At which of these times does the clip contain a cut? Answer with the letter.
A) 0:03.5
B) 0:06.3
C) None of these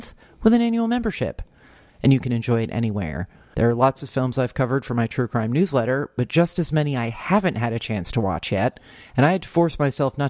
A